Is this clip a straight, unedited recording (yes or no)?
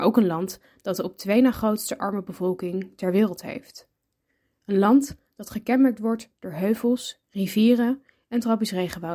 yes